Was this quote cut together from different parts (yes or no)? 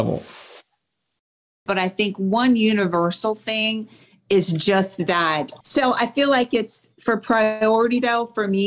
yes